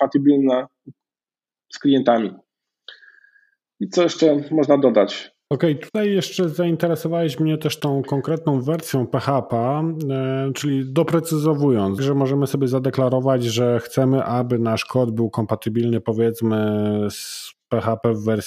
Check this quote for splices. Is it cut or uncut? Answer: cut